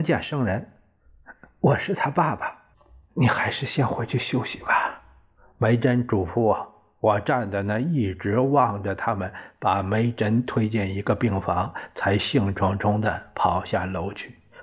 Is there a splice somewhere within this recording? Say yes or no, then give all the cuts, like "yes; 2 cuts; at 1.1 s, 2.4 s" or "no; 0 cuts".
no; 0 cuts